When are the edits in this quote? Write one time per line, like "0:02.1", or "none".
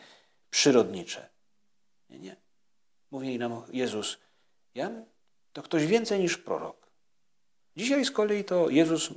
0:07.7